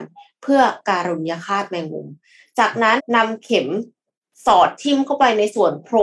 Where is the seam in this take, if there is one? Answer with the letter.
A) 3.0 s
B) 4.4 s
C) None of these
A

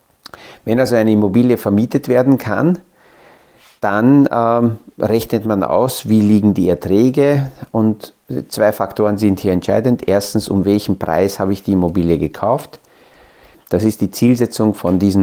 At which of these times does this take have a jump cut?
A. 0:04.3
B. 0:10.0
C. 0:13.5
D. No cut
C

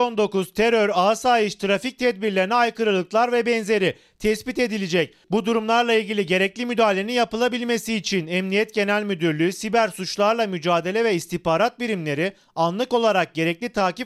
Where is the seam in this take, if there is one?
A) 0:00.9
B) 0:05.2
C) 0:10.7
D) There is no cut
D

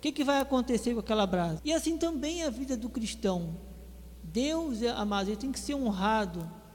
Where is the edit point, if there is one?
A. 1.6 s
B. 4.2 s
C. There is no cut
A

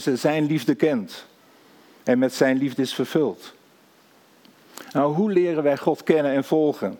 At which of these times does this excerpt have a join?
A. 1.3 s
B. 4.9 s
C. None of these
C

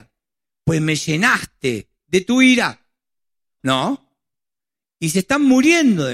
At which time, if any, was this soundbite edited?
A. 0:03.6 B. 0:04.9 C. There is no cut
A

